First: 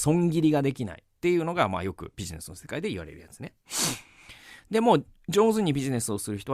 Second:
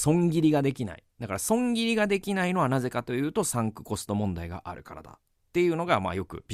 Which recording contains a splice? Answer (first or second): first